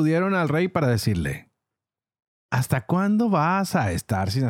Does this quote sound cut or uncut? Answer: uncut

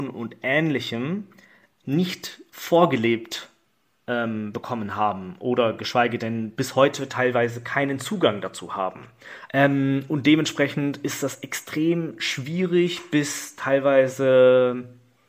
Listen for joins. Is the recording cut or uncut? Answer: cut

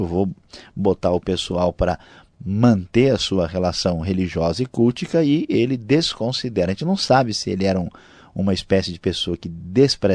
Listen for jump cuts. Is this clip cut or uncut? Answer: uncut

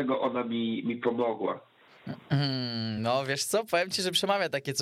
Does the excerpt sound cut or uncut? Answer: uncut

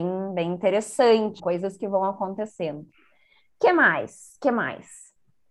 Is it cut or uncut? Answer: cut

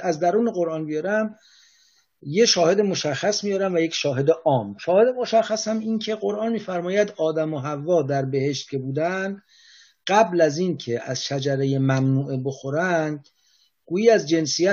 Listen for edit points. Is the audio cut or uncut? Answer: uncut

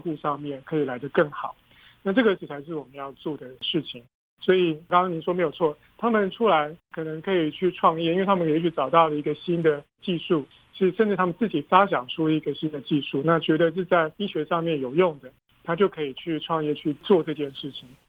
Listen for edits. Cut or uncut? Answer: uncut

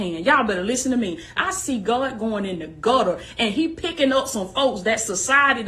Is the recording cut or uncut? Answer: cut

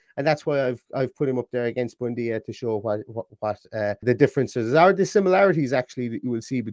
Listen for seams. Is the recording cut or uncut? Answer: cut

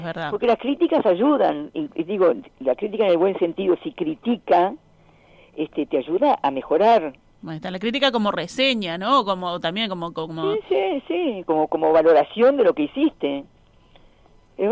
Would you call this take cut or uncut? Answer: uncut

